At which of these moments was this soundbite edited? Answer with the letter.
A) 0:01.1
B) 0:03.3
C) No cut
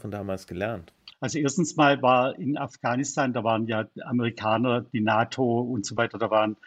A